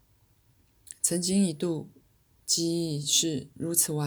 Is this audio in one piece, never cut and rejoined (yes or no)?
yes